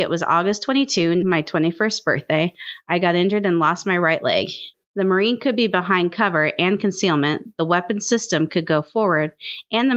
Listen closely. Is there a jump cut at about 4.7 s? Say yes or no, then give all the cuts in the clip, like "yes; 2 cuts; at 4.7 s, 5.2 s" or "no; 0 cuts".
yes; 2 cuts; at 1.2 s, 4.7 s